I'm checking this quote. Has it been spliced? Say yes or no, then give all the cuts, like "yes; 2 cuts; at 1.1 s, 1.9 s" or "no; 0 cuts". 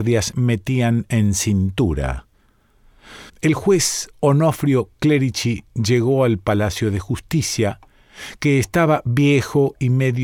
yes; 1 cut; at 3.3 s